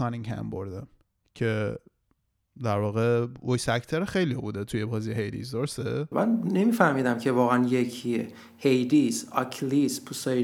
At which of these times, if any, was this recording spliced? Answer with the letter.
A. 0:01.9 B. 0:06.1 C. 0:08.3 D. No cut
B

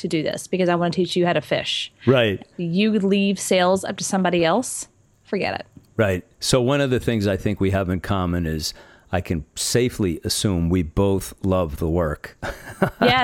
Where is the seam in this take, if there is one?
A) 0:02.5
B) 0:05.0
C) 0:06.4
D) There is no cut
A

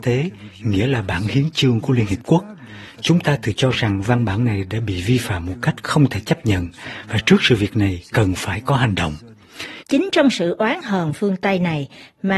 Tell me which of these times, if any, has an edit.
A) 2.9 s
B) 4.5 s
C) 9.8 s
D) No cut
C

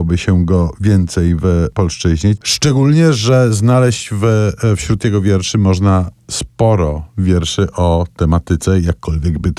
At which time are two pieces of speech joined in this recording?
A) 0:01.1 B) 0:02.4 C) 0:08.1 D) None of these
B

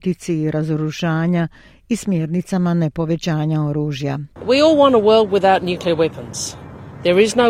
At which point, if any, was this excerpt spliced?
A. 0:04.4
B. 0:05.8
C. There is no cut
C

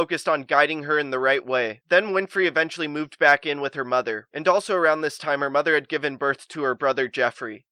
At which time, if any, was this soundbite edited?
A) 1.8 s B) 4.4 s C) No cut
A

